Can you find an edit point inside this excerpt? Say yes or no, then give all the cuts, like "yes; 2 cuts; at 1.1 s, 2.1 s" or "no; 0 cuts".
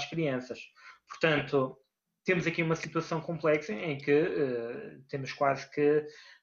no; 0 cuts